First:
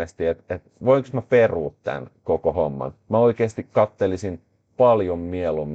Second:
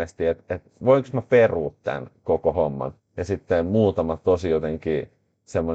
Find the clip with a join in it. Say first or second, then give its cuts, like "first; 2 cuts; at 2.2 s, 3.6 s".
second; 1 cut; at 3.0 s